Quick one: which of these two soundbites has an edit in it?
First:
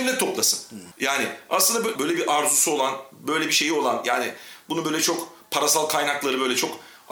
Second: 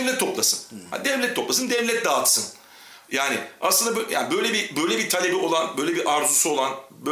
first; 2 cuts; at 0.9 s, 2.0 s

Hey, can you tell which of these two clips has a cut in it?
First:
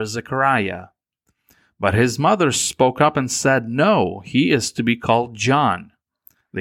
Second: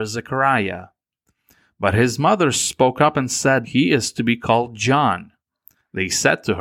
second; 1 cut; at 3.6 s

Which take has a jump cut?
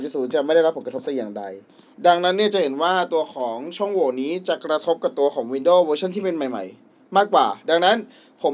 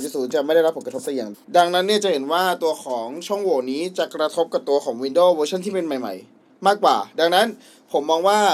second; 1 cut; at 1.3 s

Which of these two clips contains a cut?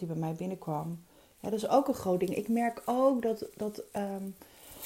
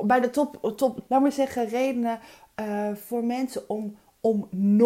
second; 1 cut; at 1.1 s

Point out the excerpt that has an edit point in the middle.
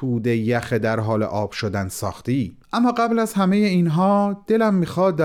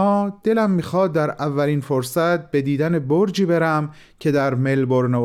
first; 1 cut; at 2.6 s

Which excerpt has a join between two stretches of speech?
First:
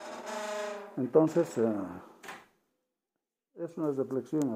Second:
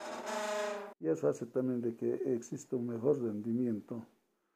second; 1 cut; at 0.9 s

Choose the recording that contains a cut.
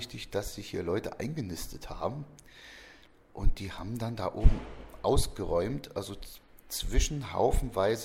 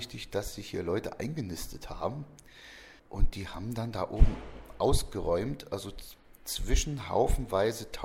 second; 1 cut; at 3.0 s

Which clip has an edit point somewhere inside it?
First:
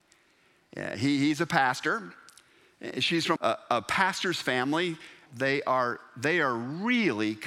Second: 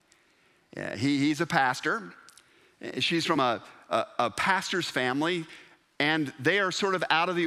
first; 2 cuts; at 3.4 s, 5.3 s

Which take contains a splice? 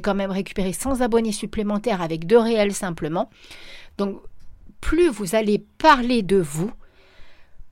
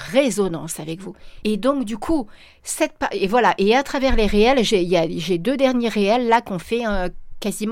second; 1 cut; at 1.4 s

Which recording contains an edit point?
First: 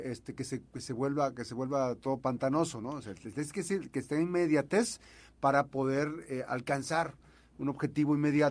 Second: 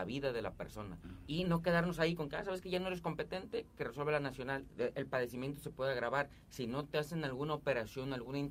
second; 2 cuts; at 1.2 s, 4.7 s

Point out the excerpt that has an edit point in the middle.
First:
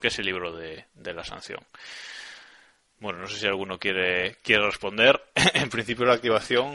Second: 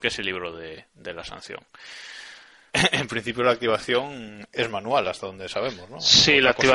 second; 1 cut; at 2.7 s

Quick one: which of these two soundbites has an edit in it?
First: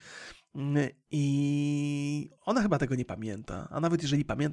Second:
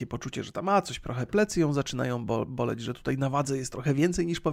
first; 1 cut; at 2.4 s

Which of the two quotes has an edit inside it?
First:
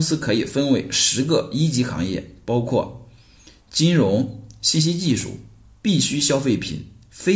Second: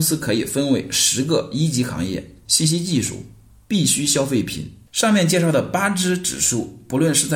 second; 2 cuts; at 2.4 s, 4.9 s

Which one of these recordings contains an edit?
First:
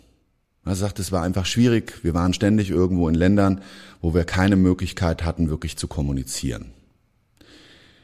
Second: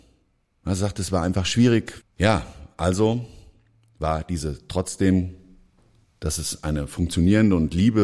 second; 1 cut; at 2.0 s

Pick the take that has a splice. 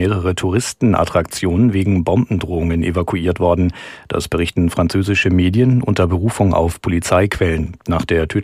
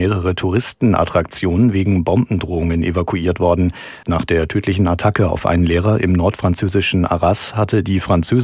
second; 1 cut; at 4.0 s

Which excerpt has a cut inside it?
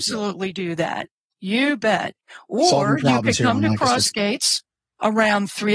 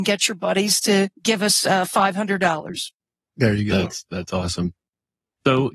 second; 1 cut; at 1.1 s

